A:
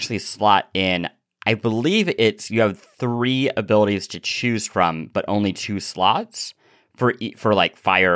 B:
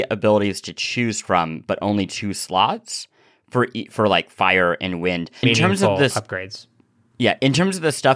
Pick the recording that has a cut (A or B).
B